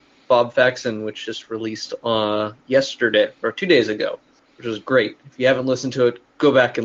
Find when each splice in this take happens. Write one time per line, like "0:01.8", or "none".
none

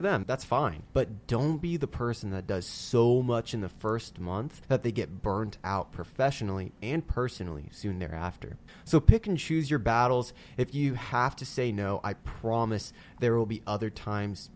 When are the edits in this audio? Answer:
none

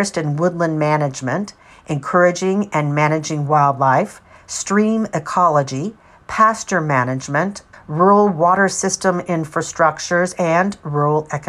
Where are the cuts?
0:07.7

